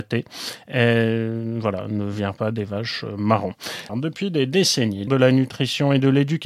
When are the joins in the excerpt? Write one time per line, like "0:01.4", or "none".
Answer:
0:03.9
0:05.1